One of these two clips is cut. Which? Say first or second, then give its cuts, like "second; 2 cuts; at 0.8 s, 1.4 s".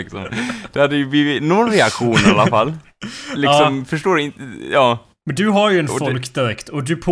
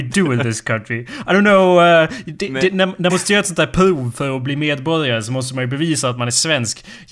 second; 1 cut; at 3.1 s